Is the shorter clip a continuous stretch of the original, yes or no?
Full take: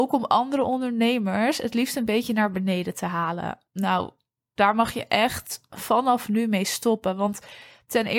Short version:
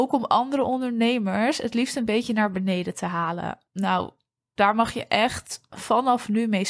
yes